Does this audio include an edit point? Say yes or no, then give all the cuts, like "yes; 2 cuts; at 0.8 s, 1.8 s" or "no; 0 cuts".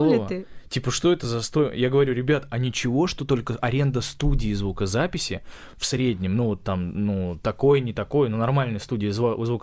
no; 0 cuts